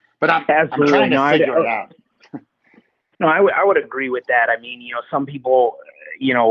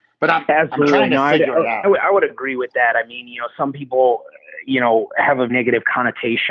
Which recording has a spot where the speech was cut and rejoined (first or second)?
second